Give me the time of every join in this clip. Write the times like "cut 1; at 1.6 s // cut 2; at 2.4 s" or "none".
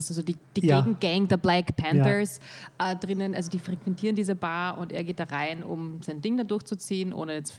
none